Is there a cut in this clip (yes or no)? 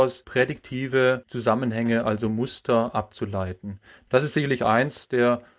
no